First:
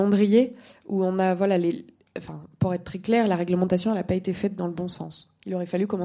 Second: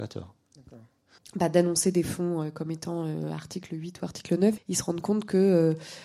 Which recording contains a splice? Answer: second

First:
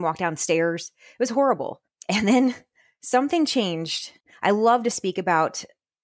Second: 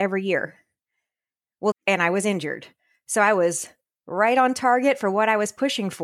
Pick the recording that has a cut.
second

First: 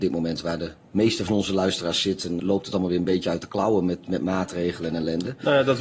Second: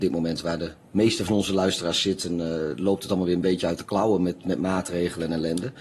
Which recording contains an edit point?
first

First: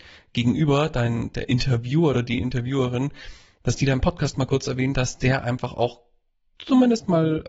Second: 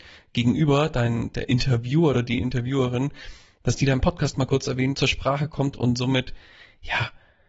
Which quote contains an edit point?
second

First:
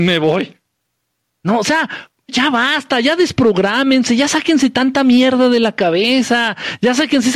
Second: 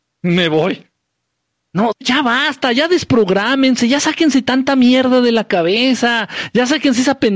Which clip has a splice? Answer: second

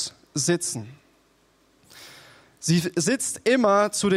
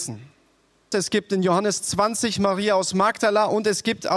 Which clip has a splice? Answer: second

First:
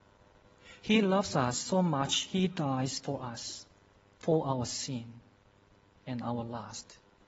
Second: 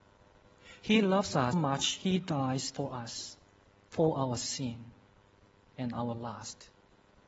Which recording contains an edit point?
second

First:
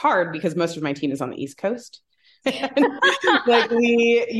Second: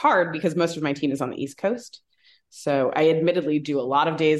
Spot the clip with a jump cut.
first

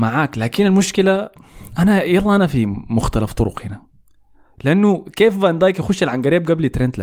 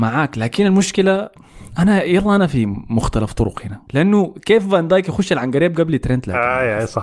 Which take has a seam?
second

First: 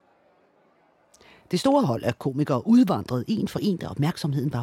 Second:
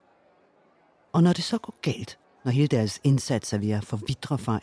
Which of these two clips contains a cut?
second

